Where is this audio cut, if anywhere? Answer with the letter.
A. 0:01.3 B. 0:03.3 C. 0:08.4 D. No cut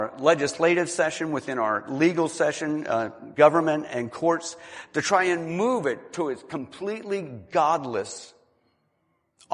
B